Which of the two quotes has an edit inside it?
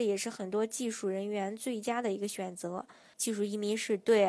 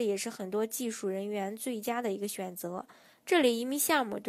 first; 1 cut; at 3.1 s

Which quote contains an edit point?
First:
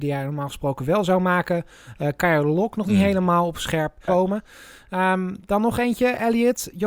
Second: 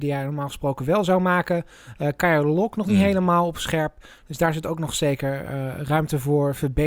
first; 1 cut; at 4.1 s

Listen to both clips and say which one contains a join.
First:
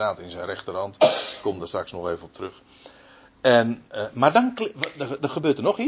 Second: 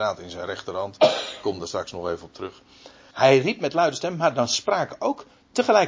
second; 1 cut; at 3.1 s

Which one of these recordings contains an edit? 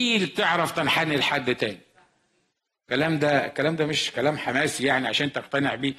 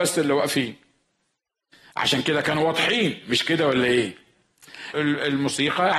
second; 1 cut; at 4.9 s

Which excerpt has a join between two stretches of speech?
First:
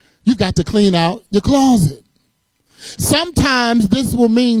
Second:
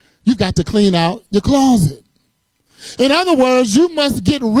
first; 1 cut; at 3.0 s

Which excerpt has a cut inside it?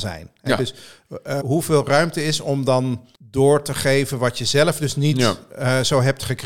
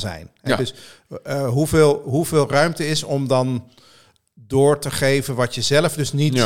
first; 2 cuts; at 1.4 s, 3.1 s

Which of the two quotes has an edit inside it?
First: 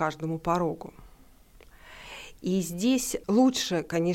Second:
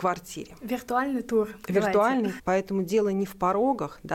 second; 1 cut; at 2.4 s

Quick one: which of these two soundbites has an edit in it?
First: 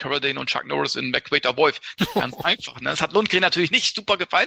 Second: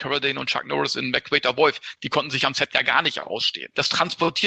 first; 1 cut; at 2.0 s

